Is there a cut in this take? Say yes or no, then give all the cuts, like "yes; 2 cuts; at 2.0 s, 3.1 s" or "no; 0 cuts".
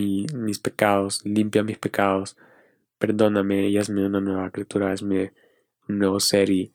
no; 0 cuts